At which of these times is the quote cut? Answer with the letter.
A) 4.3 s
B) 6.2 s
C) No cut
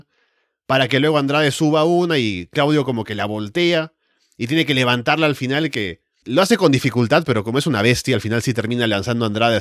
B